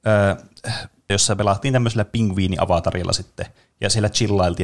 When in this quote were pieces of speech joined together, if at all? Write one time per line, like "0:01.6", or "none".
0:01.1